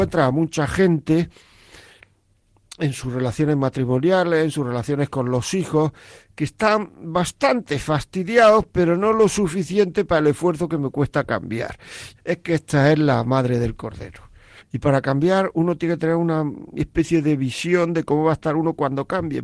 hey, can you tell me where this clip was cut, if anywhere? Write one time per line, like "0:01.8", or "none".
0:12.2
0:14.6